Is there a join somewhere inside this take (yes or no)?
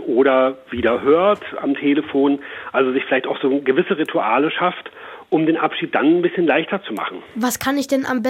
no